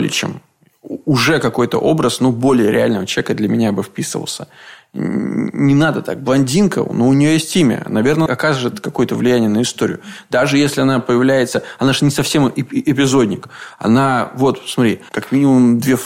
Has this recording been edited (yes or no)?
yes